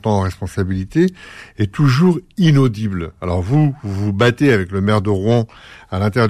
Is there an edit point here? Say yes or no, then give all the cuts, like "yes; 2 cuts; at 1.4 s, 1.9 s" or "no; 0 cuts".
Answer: no; 0 cuts